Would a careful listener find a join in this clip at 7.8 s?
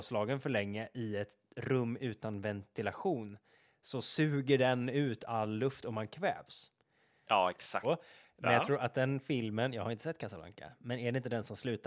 yes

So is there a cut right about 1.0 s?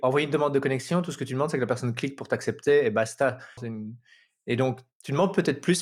no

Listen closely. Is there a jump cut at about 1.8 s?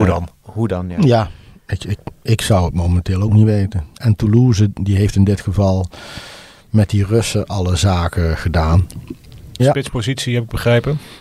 no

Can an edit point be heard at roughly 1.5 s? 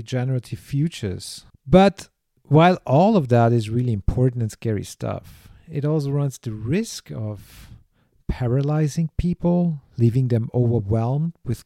yes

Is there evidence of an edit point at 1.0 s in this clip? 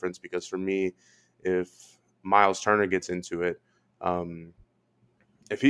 no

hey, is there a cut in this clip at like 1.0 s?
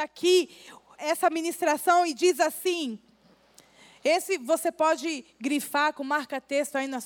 yes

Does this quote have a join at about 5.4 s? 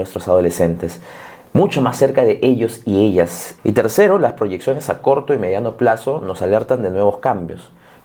no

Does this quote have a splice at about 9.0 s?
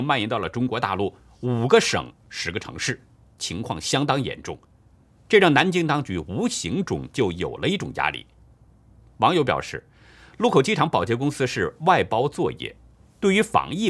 yes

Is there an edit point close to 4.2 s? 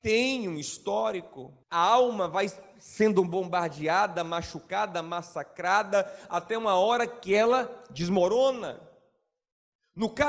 no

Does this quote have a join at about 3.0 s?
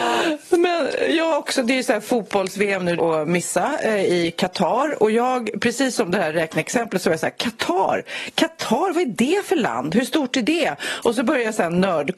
yes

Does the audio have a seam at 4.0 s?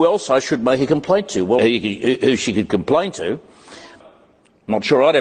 yes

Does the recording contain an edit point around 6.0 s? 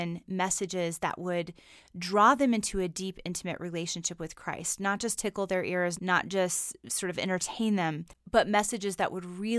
yes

